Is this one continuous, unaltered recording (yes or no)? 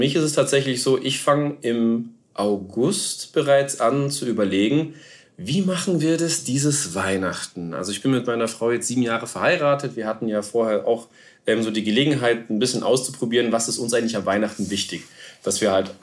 yes